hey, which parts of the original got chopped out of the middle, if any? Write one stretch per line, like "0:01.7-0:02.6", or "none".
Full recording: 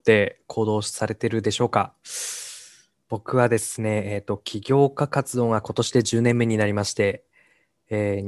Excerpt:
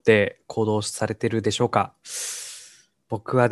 none